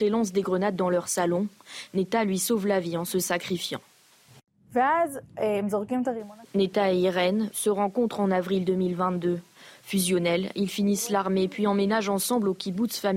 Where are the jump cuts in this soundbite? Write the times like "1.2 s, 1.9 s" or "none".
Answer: 6.4 s, 7.5 s

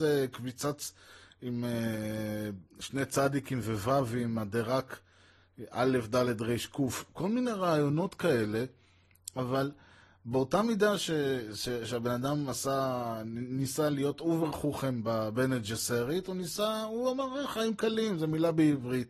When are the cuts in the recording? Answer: none

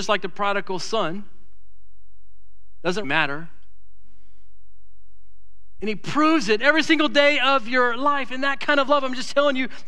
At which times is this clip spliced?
3.0 s, 5.8 s

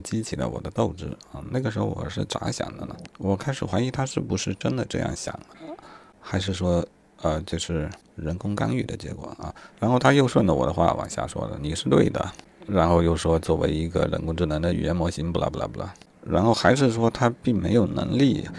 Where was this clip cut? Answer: 9.7 s

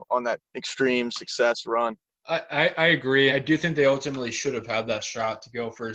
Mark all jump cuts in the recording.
3.3 s

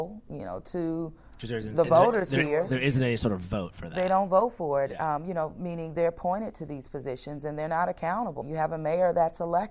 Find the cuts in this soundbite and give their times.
8.4 s

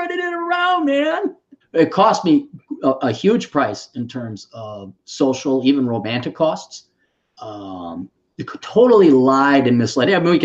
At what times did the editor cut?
1.6 s

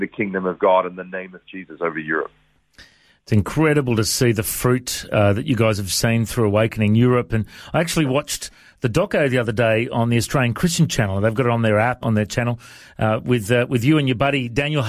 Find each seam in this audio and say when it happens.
12.0 s

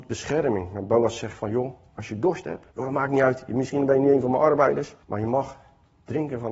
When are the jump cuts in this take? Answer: 2.7 s, 5.0 s

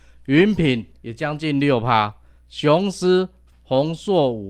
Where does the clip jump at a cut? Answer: 3.5 s

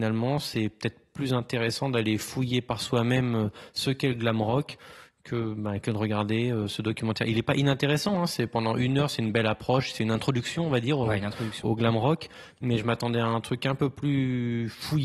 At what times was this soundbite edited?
11.6 s

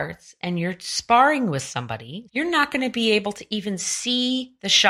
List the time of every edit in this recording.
2.3 s

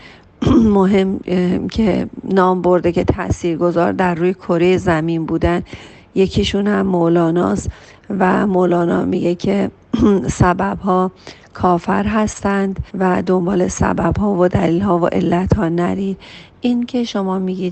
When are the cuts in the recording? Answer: 12.9 s

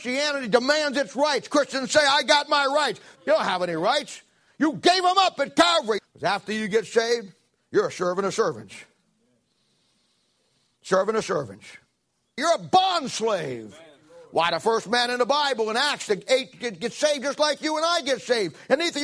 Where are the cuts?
3.2 s, 6.0 s, 12.4 s

